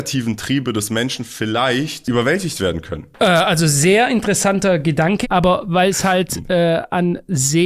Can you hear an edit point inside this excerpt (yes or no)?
yes